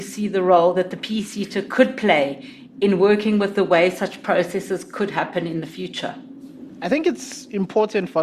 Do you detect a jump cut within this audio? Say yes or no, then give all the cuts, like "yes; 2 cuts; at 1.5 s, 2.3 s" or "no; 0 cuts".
no; 0 cuts